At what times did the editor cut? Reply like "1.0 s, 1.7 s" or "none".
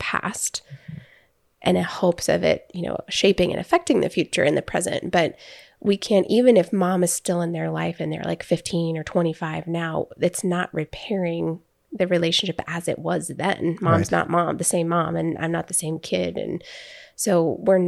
none

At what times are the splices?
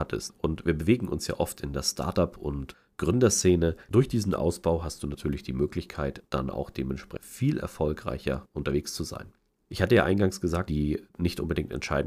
3.9 s, 9.6 s, 10.7 s

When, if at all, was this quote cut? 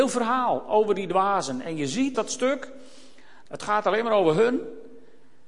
2.1 s, 3.5 s

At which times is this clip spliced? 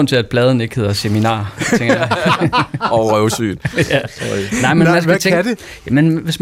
none

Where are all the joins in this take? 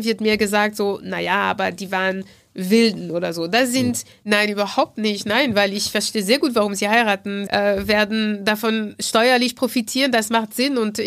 4.2 s, 7.5 s

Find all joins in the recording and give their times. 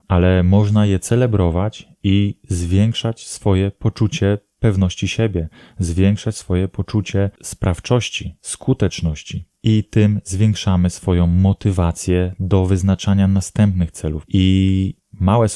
14.2 s

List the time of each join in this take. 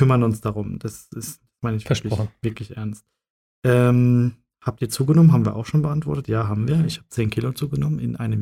none

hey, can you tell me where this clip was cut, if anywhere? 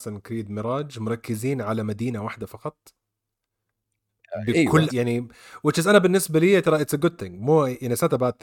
4.9 s

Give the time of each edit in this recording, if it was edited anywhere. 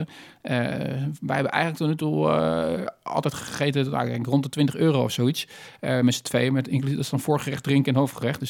none

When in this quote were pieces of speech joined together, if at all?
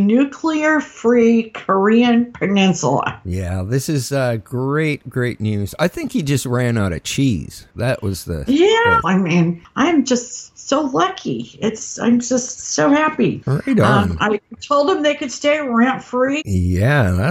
9.0 s, 16.4 s

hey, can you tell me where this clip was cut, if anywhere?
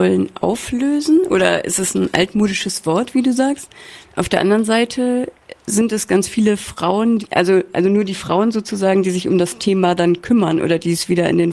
none

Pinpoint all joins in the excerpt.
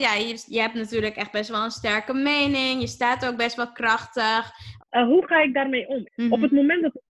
4.8 s, 6.0 s

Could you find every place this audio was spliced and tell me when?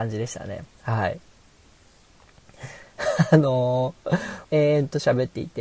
2.8 s, 4.4 s

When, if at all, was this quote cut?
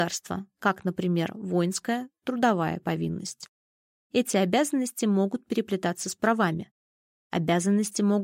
none

